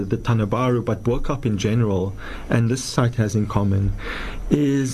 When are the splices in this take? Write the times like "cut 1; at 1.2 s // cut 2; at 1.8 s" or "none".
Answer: none